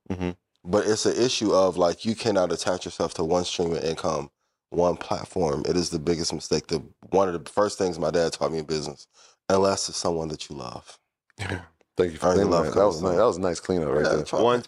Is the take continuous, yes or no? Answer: no